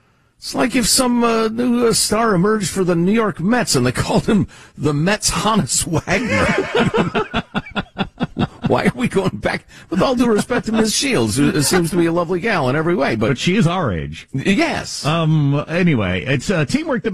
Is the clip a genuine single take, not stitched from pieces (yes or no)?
yes